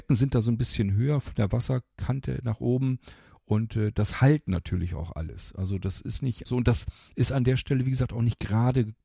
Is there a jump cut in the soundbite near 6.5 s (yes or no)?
yes